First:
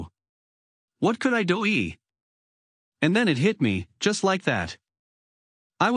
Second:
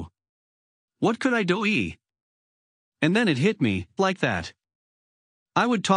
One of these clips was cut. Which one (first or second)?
second